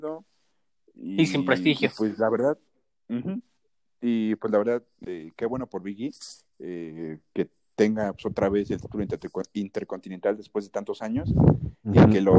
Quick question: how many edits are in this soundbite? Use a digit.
0